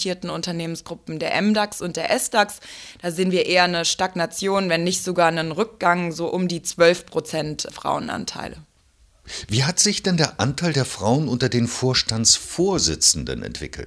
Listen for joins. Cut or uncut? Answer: uncut